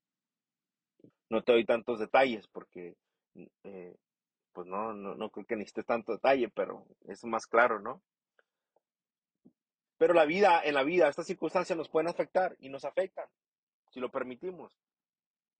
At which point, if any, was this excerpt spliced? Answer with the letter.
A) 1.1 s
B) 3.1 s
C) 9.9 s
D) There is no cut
A